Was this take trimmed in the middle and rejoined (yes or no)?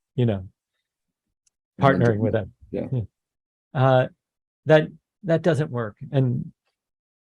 no